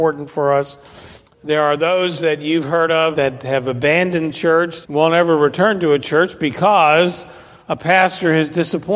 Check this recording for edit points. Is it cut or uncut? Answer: cut